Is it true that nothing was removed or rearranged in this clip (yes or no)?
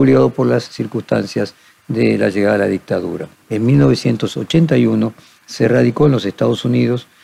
no